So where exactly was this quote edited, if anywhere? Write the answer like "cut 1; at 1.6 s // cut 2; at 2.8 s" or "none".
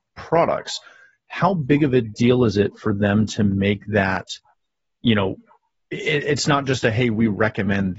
none